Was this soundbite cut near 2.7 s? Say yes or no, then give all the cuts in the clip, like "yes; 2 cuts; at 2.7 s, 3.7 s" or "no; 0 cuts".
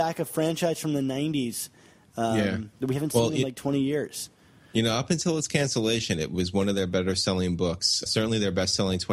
yes; 2 cuts; at 2.7 s, 8.1 s